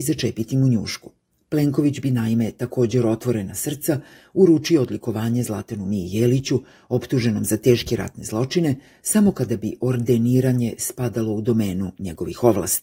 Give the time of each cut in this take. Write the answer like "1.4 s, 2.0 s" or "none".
none